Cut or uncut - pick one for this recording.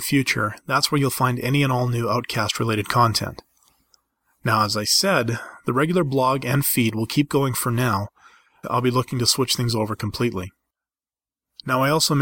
cut